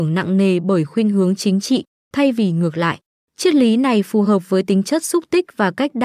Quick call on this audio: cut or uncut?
cut